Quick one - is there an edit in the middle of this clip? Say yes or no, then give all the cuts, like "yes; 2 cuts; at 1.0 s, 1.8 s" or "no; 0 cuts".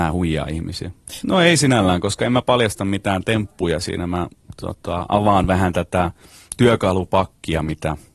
yes; 1 cut; at 1.2 s